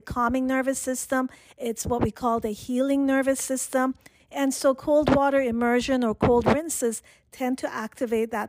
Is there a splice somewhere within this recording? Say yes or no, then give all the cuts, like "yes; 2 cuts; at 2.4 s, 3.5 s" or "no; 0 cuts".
yes; 1 cut; at 4.2 s